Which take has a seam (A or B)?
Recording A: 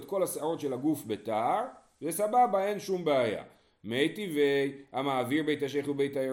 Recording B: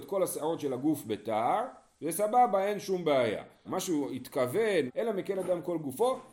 B